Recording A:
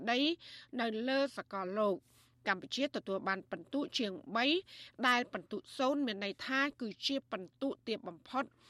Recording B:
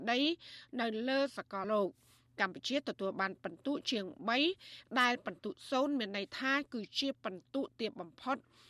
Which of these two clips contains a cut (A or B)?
B